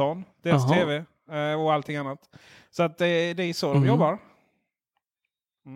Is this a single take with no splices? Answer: yes; 0 cuts

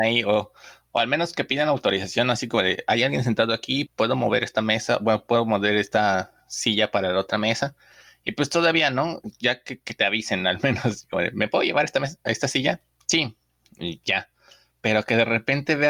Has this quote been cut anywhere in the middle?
yes; 1 cut; at 3.9 s

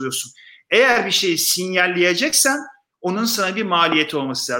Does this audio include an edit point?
no; 0 cuts

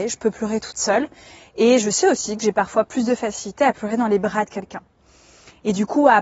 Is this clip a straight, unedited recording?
yes; 0 cuts

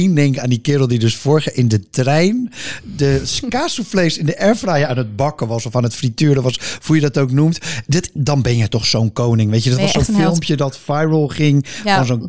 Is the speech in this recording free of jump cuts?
yes; 0 cuts

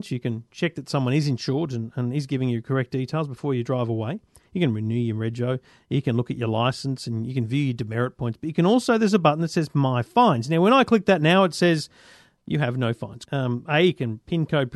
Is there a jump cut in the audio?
yes; 1 cut; at 13.2 s

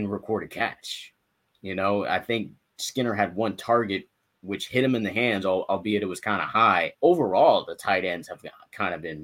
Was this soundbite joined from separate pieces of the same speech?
yes; 1 cut; at 6.9 s

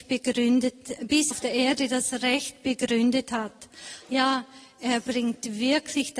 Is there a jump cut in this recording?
yes; 2 cuts; at 1.3 s, 4.0 s

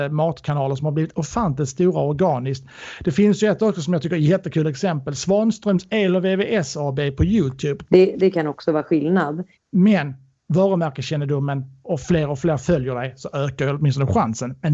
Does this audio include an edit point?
yes; 3 cuts; at 7.8 s, 9.5 s, 11.8 s

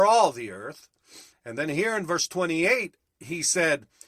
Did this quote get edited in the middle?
yes; 1 cut; at 1.3 s

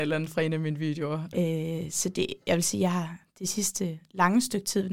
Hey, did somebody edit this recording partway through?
yes; 1 cut; at 1.3 s

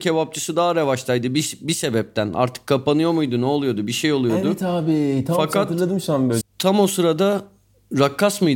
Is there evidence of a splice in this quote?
yes; 1 cut; at 6.4 s

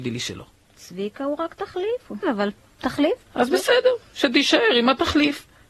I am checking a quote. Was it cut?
yes; 1 cut; at 2.2 s

